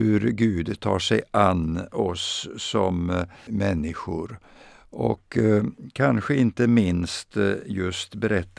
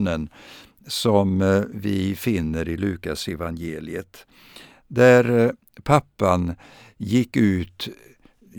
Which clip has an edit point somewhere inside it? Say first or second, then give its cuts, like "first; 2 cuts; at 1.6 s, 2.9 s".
first; 1 cut; at 3.5 s